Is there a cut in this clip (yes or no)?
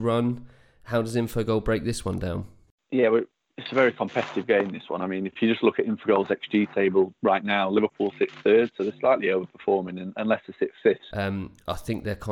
yes